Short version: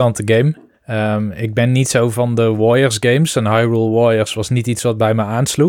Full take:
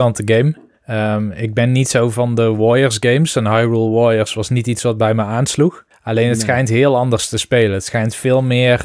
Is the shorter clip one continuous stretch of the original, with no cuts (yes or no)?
yes